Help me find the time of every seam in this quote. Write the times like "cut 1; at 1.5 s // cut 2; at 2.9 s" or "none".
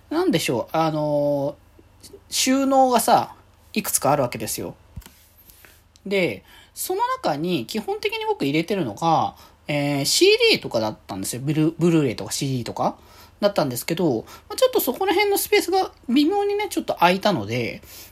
none